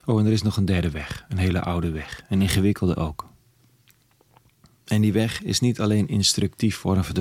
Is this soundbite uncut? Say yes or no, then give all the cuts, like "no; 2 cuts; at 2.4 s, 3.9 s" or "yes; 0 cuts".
yes; 0 cuts